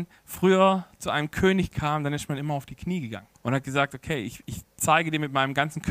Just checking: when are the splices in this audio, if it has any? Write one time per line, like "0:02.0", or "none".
0:03.3